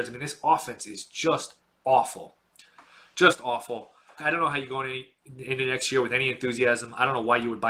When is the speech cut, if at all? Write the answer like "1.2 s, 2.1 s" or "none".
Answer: 4.2 s